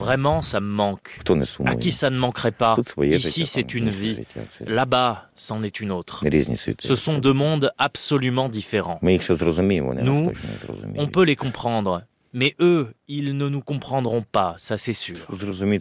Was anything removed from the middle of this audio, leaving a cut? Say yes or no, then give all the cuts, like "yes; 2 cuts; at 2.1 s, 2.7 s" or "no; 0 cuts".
no; 0 cuts